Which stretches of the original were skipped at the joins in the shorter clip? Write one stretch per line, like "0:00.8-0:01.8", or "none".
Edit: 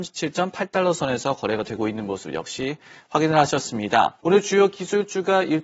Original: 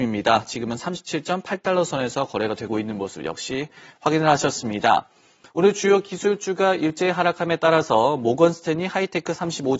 0:05.1-0:05.5